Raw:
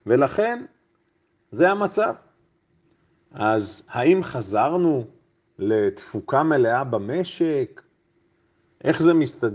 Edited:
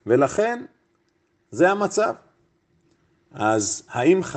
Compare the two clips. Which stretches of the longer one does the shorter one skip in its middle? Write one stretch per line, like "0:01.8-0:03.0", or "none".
none

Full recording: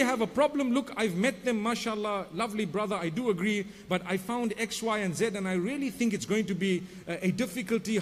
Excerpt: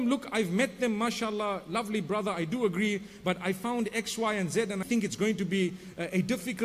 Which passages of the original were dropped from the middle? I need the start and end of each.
0:05.5-0:05.9

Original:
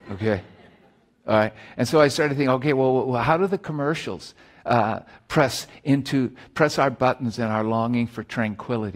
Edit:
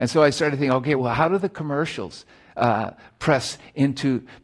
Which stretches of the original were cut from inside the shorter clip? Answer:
0:02.7-0:03.1

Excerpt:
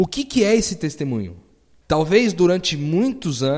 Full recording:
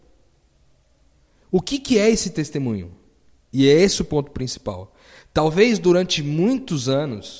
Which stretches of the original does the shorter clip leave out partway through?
0:03.4-0:05.3

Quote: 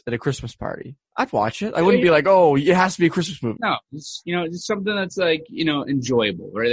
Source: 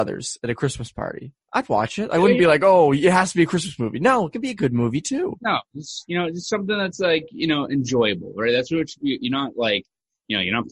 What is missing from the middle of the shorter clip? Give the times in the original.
0:03.9-0:05.4

